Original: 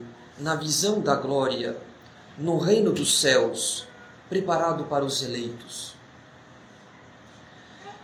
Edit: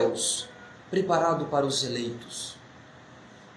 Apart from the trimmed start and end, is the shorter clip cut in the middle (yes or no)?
no